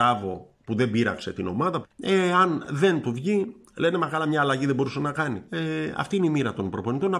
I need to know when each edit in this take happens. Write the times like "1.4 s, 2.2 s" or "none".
1.8 s, 5.5 s